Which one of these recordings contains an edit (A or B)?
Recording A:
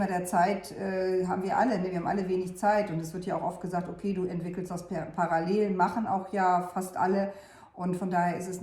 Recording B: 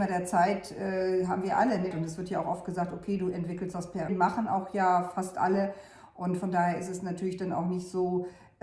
B